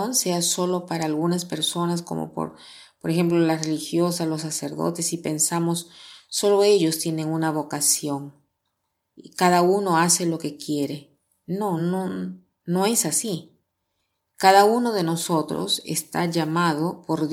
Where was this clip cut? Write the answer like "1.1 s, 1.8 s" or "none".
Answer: none